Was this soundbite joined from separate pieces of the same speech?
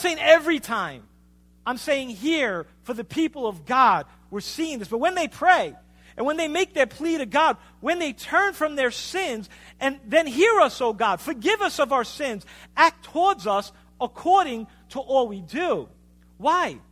no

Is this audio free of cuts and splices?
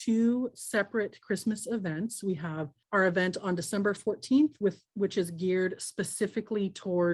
yes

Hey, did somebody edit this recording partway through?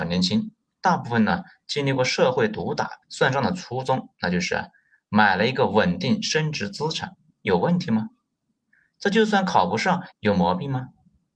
yes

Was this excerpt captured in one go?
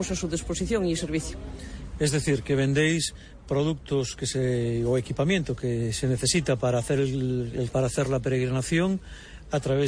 no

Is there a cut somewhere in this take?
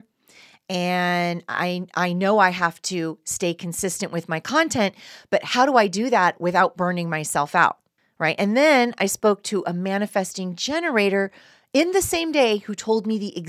no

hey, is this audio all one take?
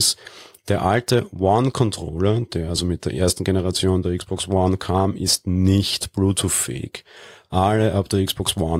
yes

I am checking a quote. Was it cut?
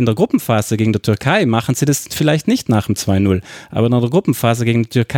no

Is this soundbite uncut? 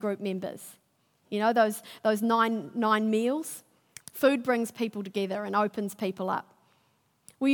no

